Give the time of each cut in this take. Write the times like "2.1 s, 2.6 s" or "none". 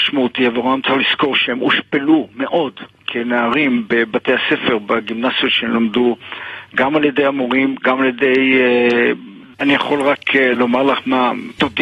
9.5 s